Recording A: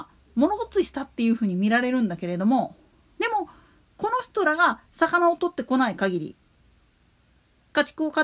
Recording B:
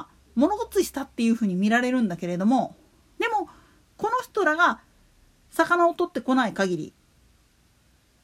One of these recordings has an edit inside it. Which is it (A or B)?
A